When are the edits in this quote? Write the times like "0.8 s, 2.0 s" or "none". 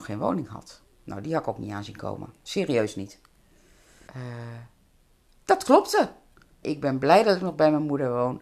4.1 s, 6.6 s